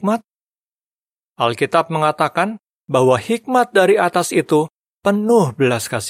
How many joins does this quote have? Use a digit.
1